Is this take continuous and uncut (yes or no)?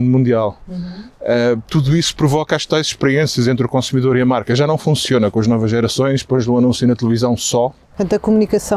yes